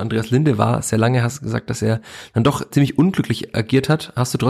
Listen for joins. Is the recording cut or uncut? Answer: cut